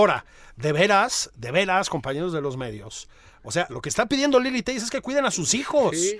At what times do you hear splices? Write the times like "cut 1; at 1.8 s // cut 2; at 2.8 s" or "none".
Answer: cut 1; at 3.7 s